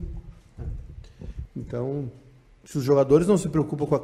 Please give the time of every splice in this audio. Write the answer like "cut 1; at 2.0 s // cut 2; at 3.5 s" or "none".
cut 1; at 1.5 s